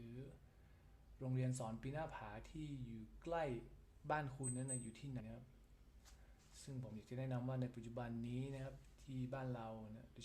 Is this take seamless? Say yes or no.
no